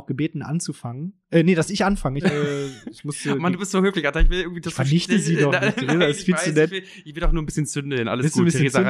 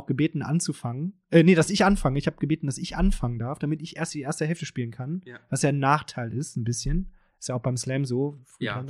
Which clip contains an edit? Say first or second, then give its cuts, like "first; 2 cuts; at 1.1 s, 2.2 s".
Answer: first; 1 cut; at 2.2 s